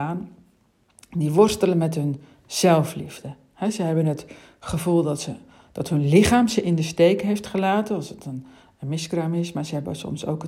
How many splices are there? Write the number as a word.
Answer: zero